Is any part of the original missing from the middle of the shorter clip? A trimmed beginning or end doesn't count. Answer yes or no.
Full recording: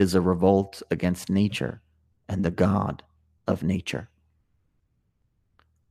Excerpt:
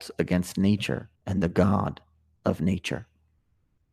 yes